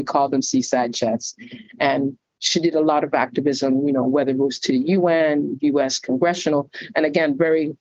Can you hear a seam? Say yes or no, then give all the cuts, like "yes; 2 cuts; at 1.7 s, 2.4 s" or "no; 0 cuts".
no; 0 cuts